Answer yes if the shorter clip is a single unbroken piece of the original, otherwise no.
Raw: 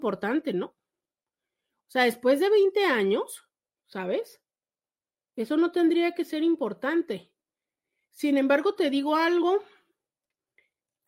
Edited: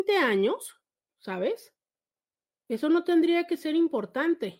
yes